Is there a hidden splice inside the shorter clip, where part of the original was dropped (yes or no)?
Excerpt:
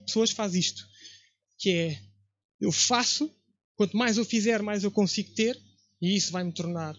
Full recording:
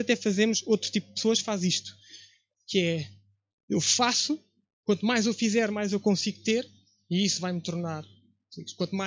no